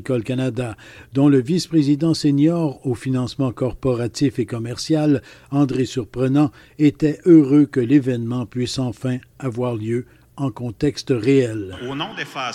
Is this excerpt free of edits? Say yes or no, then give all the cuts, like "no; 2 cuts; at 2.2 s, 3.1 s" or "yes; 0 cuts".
yes; 0 cuts